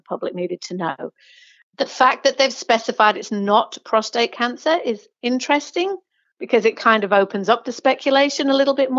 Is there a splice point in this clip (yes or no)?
no